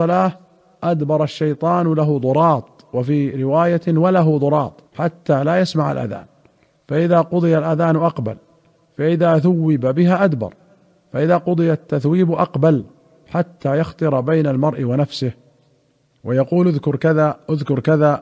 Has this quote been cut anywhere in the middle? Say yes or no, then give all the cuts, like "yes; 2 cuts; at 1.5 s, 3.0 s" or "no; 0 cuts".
yes; 1 cut; at 4.9 s